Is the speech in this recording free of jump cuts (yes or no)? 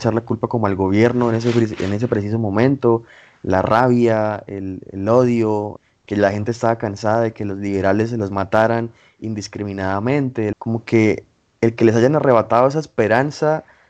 no